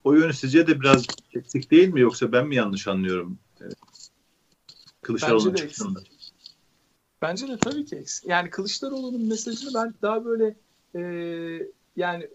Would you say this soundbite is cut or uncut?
cut